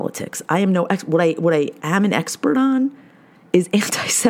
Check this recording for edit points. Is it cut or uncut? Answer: uncut